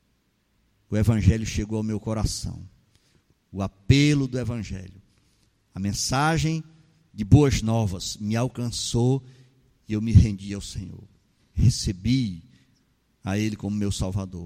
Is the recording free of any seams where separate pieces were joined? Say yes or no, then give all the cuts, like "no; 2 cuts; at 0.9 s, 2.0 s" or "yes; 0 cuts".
no; 1 cut; at 11.4 s